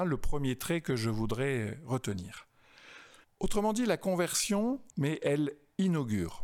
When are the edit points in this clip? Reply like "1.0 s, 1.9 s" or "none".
3.2 s, 4.9 s